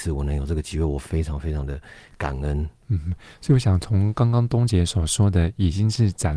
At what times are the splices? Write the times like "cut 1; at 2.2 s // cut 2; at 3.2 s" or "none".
none